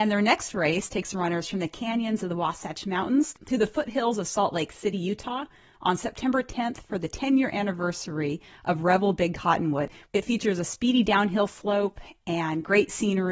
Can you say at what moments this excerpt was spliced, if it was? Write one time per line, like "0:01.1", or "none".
none